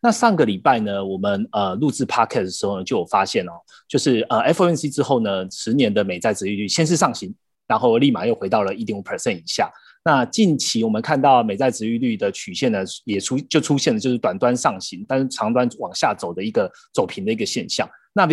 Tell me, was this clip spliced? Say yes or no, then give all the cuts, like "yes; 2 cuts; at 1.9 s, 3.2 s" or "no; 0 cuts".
no; 0 cuts